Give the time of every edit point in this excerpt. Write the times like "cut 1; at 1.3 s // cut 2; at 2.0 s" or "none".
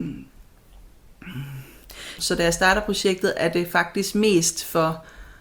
cut 1; at 2.2 s